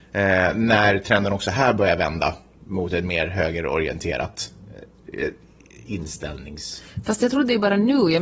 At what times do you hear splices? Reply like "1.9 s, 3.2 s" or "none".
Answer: none